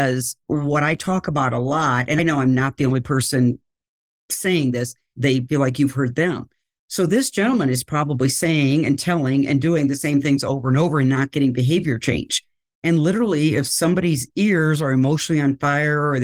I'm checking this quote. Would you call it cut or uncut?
cut